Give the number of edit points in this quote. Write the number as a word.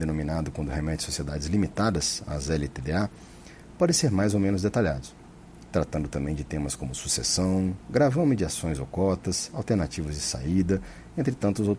zero